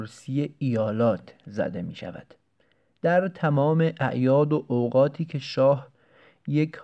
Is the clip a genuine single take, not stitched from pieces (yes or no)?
yes